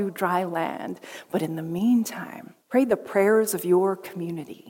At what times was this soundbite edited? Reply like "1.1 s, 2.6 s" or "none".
2.6 s